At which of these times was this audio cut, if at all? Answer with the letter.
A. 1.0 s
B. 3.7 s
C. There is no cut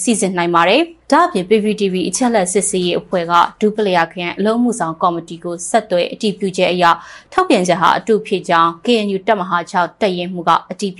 A